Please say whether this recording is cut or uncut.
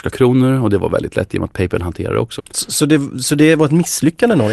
cut